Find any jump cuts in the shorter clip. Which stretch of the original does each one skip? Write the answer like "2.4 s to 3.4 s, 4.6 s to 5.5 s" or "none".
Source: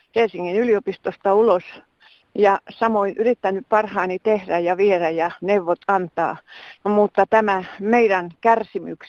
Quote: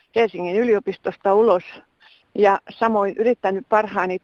none